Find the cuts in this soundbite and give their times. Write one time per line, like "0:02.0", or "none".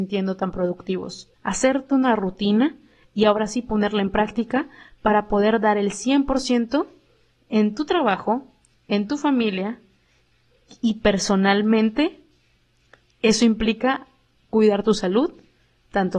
0:01.3